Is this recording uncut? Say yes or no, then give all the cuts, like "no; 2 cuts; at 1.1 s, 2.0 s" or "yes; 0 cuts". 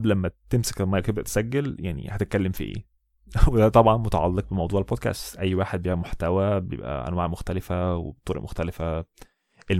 yes; 0 cuts